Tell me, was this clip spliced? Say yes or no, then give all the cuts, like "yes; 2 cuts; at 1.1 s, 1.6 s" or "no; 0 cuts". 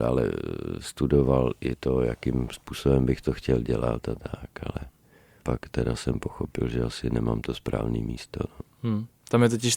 no; 0 cuts